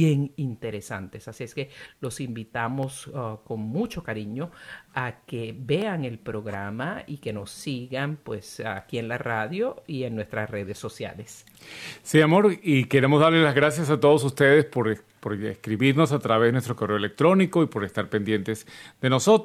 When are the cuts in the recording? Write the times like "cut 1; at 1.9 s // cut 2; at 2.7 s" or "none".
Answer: none